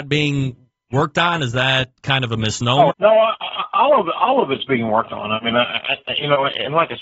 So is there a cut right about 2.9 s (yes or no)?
yes